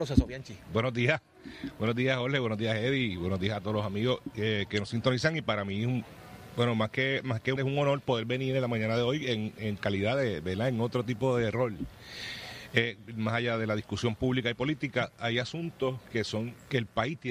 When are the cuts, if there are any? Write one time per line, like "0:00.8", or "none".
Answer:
0:07.6